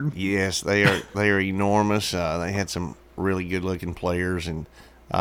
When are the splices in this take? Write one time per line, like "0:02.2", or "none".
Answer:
none

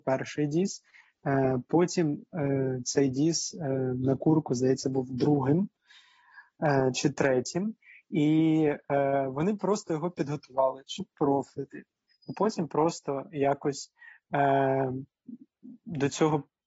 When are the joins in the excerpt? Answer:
0:12.1

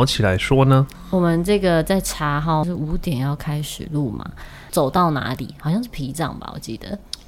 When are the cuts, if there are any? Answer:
0:02.6
0:04.7

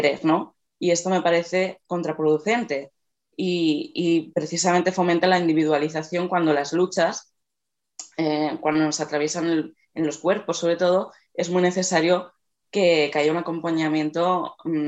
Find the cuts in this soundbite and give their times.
none

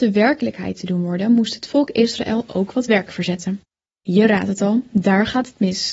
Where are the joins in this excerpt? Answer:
none

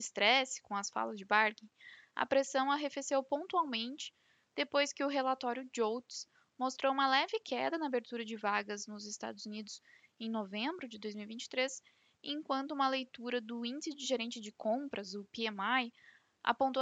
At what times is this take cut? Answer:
none

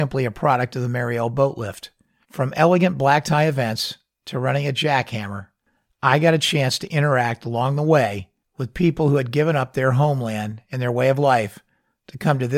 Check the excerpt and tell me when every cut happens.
0:02.2

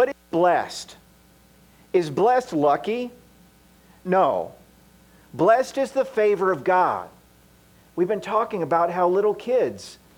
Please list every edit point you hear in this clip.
0:07.8

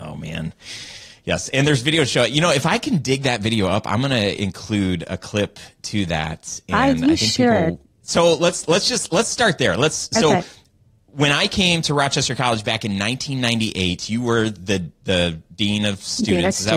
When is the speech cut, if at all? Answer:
0:07.8

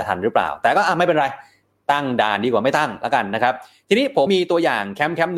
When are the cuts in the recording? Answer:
0:04.3

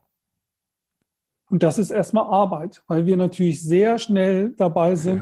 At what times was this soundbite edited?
0:01.5

